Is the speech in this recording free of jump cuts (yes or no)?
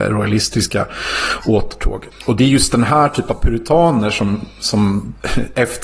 yes